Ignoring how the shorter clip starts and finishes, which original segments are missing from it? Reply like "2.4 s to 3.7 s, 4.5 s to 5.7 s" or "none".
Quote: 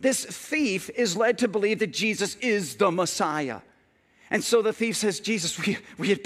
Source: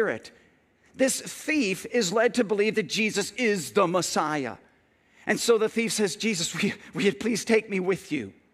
none